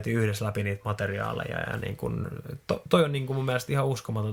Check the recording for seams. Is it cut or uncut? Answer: uncut